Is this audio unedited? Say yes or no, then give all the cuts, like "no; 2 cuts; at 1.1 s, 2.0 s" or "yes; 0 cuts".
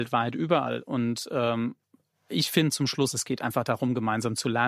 yes; 0 cuts